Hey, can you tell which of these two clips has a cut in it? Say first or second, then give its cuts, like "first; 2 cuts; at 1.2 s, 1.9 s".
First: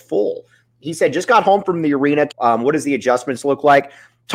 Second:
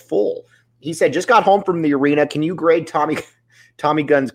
first; 1 cut; at 2.3 s